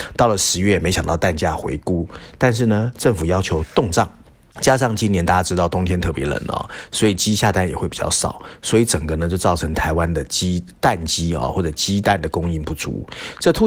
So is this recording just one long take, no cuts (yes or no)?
yes